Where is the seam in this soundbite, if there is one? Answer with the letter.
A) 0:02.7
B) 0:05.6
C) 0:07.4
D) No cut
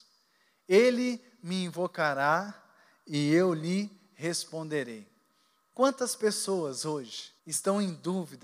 C